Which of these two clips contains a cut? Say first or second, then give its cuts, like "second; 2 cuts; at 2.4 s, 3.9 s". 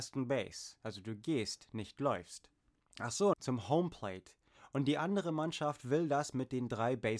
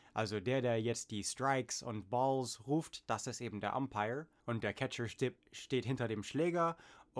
first; 1 cut; at 3.3 s